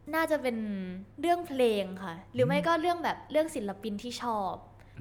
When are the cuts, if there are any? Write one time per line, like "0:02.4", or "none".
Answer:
0:01.1

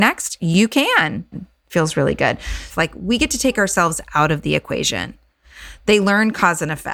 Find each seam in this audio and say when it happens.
0:01.3
0:02.7

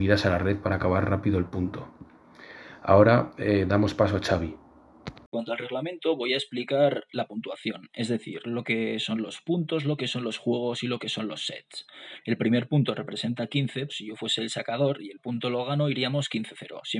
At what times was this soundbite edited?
0:12.2
0:13.9

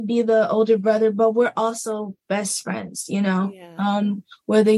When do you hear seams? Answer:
none

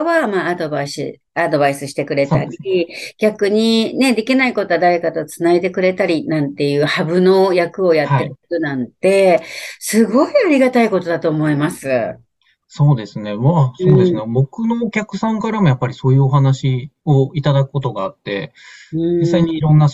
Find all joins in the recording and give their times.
none

